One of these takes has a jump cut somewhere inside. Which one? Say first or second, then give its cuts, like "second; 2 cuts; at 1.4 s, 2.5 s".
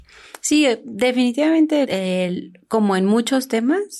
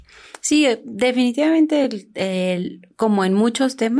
first; 1 cut; at 1.8 s